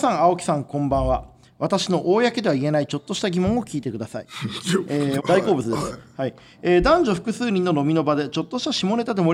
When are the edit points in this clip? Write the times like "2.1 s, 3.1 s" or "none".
5.2 s